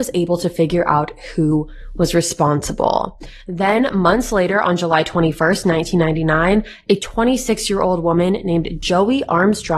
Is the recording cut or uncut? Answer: uncut